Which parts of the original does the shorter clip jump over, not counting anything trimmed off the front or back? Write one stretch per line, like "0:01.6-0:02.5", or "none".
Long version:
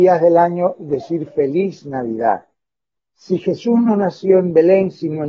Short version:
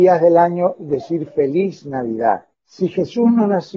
0:02.5-0:03.0